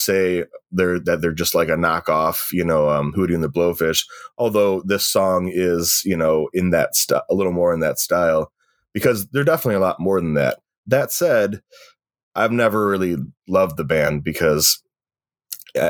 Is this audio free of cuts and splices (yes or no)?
yes